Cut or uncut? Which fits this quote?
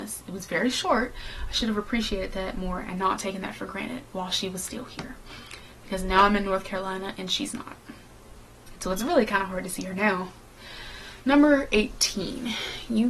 uncut